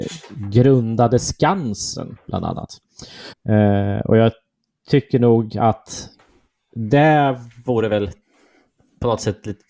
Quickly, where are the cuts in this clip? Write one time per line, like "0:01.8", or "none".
0:03.3